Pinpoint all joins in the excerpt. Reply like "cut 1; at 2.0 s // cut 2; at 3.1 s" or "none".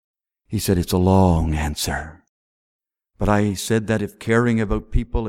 none